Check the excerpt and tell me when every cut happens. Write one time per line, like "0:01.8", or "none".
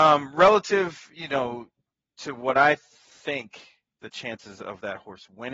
none